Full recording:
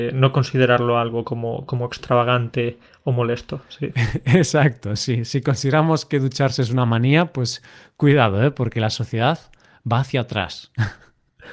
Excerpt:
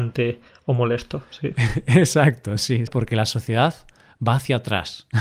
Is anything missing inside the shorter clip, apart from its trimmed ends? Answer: yes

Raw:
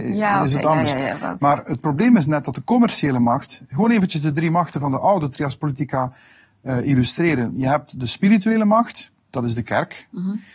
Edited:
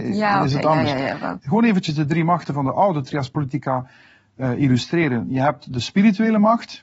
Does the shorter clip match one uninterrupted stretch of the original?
no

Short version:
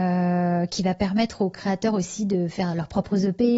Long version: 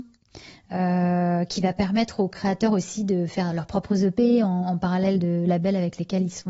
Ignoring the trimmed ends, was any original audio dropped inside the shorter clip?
no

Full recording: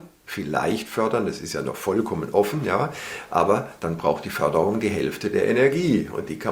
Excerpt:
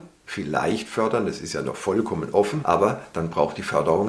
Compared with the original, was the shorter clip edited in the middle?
yes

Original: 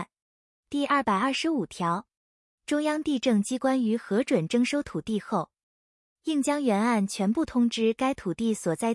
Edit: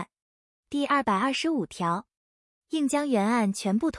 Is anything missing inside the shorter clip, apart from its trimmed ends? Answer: yes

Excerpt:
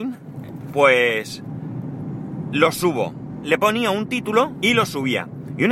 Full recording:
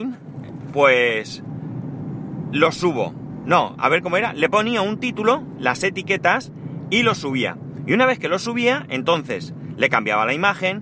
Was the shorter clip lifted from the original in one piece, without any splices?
no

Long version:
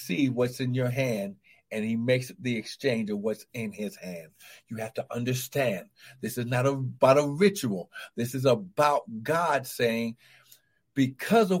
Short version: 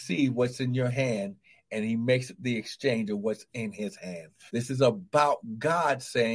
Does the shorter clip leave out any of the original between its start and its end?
yes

